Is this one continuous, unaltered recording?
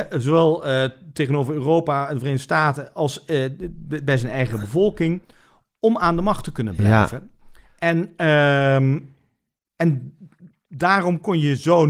yes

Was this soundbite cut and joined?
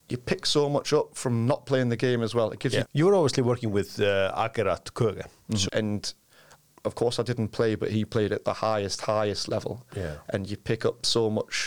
yes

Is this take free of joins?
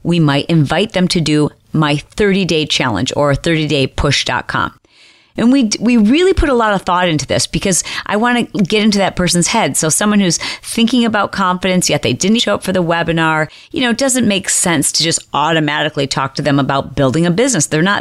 no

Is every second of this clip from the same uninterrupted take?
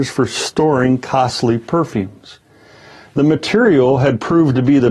yes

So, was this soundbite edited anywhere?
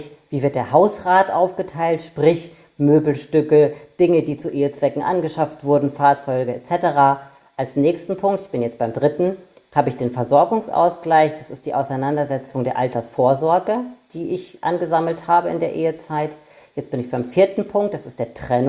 no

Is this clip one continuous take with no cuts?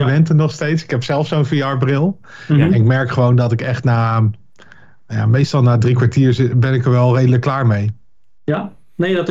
yes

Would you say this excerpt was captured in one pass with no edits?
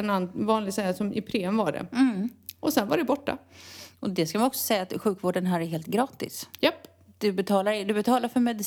yes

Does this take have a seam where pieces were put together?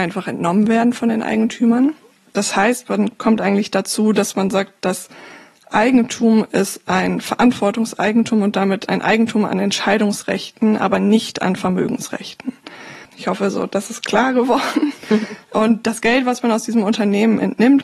yes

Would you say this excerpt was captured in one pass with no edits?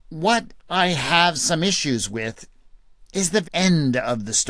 no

